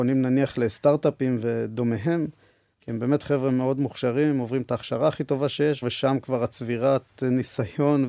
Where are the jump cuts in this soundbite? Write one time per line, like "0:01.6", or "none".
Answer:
0:02.7
0:05.8